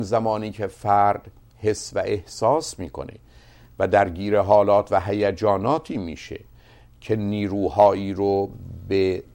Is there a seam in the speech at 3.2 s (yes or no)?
no